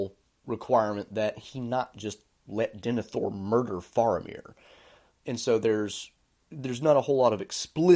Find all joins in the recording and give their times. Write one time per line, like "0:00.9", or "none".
none